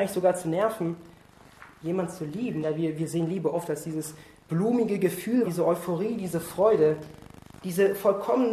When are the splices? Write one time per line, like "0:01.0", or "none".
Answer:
0:02.6
0:05.4
0:07.6